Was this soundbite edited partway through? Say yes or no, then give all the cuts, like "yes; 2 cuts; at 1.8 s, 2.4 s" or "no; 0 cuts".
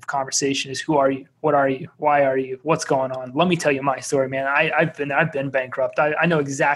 no; 0 cuts